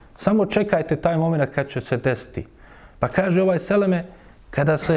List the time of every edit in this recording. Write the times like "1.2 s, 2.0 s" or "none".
none